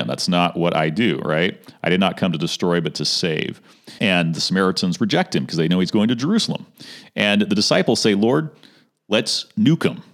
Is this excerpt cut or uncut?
cut